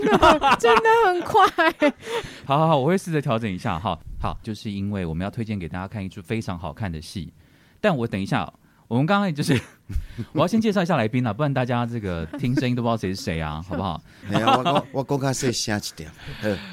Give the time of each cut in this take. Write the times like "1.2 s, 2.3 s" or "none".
4.4 s, 12.3 s, 14.2 s